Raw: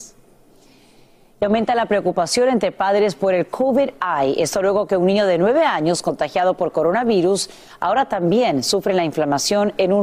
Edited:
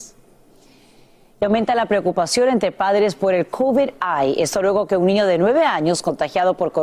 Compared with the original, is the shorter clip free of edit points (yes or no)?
yes